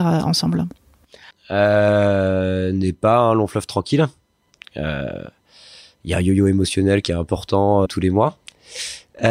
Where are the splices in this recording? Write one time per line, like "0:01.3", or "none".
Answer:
0:01.3
0:07.9